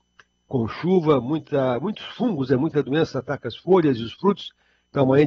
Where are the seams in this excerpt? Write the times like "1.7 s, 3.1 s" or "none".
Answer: none